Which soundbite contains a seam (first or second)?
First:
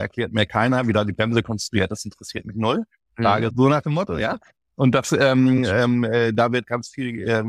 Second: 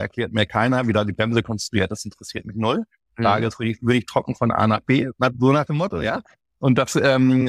first